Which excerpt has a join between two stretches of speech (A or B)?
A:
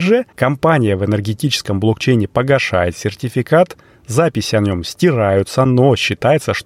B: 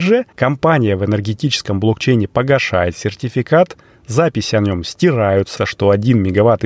B